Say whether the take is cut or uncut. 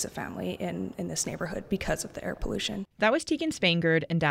cut